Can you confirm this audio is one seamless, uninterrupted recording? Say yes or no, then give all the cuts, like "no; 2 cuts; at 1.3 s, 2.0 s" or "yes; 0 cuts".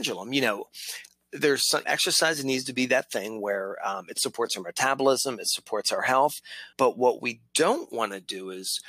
no; 2 cuts; at 1.8 s, 6.7 s